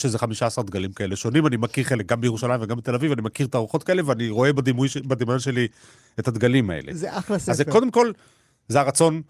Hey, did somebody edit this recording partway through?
no; 0 cuts

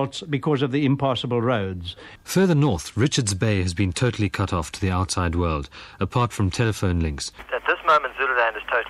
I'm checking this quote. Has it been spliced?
yes; 1 cut; at 7.5 s

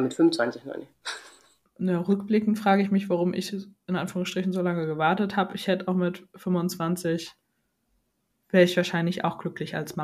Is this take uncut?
yes; 0 cuts

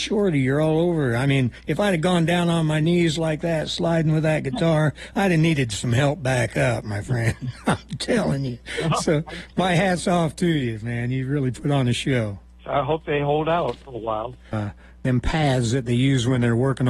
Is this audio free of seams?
no; 2 cuts; at 12.6 s, 14.5 s

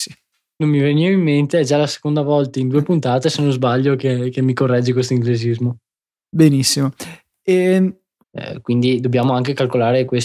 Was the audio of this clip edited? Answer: yes; 1 cut; at 8.2 s

